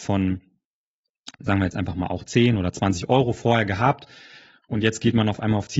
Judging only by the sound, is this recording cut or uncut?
uncut